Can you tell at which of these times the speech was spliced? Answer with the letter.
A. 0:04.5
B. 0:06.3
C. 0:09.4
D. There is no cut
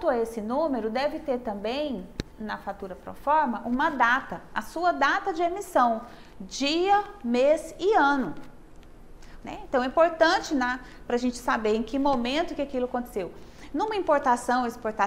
C